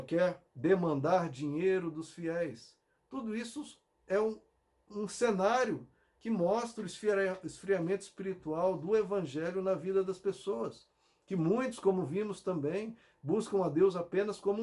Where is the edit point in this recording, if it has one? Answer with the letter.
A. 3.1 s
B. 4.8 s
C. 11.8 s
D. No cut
D